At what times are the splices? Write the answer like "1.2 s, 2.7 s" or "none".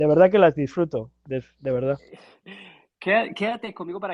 none